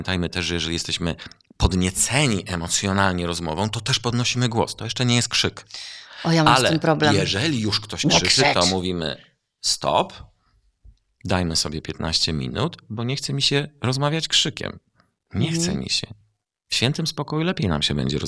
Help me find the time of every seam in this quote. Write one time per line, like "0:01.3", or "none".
none